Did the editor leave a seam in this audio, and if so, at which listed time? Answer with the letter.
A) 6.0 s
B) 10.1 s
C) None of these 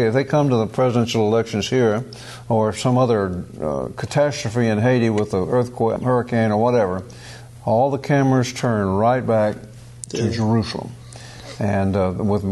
A